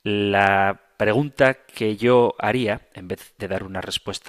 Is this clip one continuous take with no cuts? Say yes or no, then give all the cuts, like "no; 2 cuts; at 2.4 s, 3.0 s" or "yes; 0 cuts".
yes; 0 cuts